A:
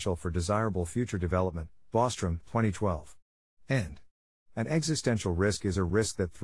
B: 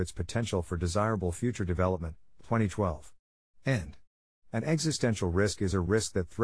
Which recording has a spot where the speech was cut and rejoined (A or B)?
B